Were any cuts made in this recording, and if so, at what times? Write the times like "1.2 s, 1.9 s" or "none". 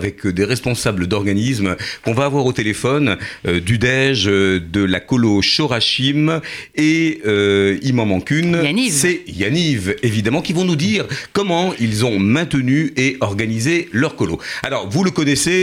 none